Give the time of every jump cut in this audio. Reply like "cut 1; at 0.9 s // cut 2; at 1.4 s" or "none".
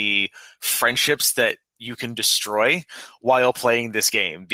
none